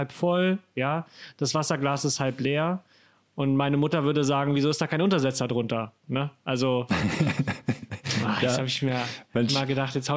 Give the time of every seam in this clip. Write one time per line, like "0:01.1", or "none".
none